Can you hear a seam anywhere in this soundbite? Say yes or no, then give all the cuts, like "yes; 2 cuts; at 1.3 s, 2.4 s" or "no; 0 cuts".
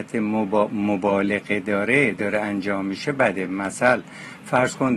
no; 0 cuts